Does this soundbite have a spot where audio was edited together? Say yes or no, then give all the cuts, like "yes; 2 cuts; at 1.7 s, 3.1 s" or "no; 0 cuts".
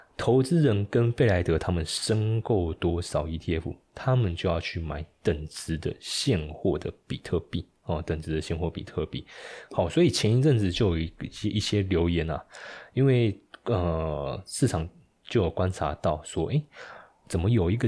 no; 0 cuts